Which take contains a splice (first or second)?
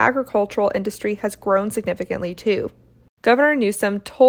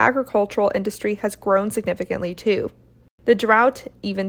first